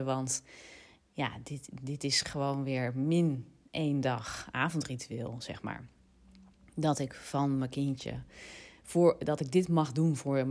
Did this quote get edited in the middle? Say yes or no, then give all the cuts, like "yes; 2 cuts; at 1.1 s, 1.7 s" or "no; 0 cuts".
no; 0 cuts